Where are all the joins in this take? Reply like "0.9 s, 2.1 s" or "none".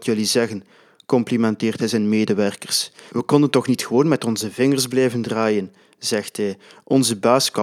3.1 s